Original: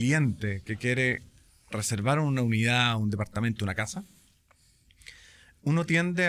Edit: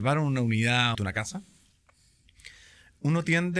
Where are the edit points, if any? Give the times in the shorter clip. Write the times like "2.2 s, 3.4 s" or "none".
0.9 s